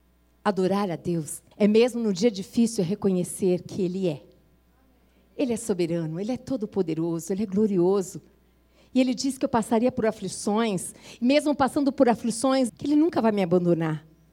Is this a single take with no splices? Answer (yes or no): no